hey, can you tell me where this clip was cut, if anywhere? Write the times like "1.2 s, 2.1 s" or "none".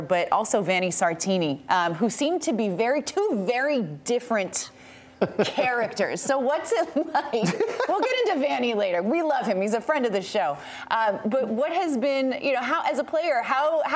none